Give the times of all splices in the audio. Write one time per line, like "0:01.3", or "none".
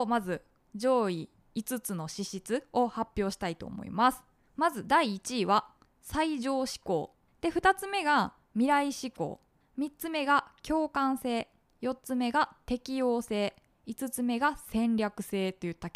none